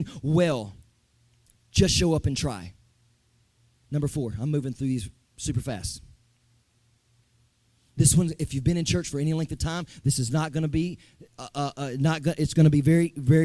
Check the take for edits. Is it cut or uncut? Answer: uncut